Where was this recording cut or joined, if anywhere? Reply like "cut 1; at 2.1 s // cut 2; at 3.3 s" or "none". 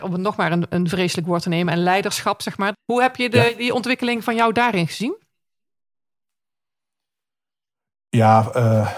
cut 1; at 2.7 s